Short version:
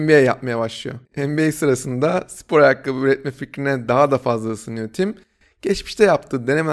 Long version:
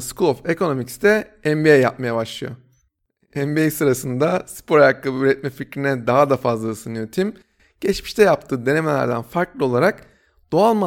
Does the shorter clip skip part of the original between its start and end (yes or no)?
yes